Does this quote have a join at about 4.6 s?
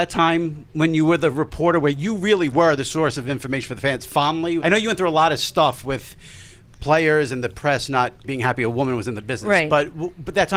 yes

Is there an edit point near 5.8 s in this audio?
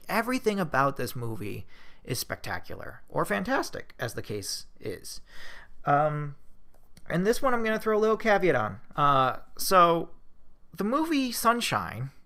no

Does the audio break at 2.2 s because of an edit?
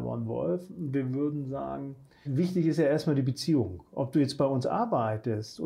yes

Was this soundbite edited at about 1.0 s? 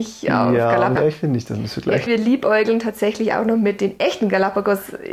yes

